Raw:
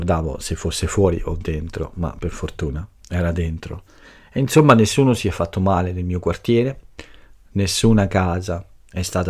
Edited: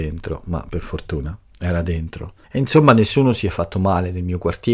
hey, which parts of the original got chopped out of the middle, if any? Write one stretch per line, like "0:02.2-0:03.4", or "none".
0:03.9-0:04.2